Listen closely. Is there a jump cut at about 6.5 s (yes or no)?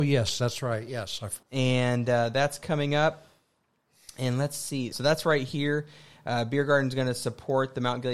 no